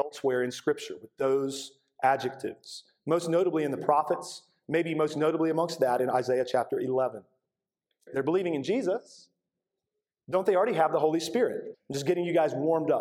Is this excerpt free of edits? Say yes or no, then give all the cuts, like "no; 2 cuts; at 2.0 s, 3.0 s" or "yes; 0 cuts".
no; 2 cuts; at 8.1 s, 11.7 s